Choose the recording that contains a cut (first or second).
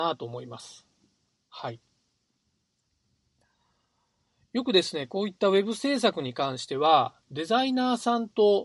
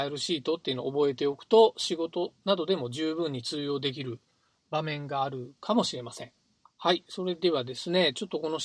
second